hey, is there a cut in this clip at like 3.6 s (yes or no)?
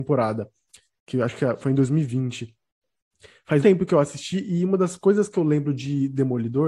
yes